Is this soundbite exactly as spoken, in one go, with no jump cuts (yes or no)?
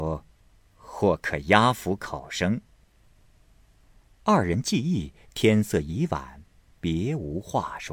yes